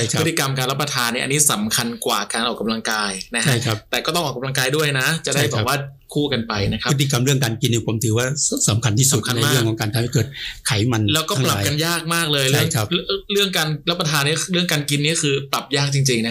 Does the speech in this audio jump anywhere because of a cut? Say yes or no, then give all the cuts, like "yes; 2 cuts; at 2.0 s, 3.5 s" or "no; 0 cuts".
no; 0 cuts